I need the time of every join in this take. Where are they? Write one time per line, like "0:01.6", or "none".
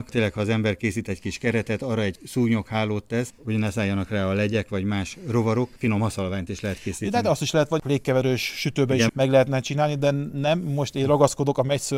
0:09.1